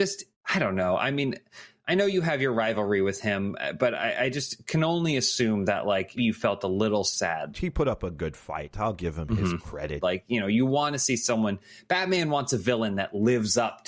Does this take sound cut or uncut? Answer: cut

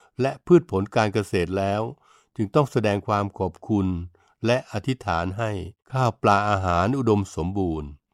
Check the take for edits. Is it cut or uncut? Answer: cut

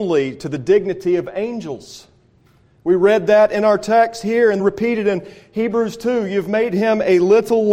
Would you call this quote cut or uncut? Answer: cut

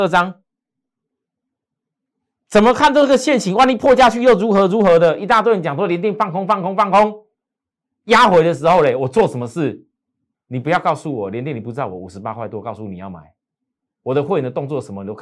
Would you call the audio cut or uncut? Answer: cut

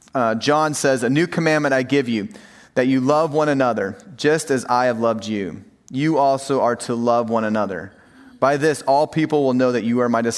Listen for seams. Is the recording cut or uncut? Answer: uncut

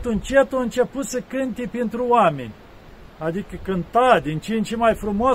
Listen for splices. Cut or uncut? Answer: uncut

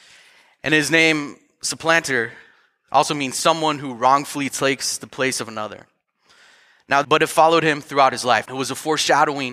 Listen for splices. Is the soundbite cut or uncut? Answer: cut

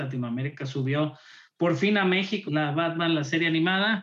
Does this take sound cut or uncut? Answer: cut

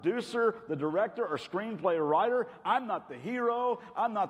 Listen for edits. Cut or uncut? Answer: uncut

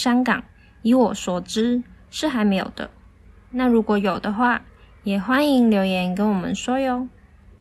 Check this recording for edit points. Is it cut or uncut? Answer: uncut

